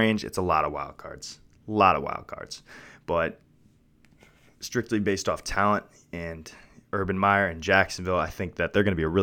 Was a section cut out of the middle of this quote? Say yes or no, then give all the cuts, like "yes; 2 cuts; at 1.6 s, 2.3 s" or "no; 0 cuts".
no; 0 cuts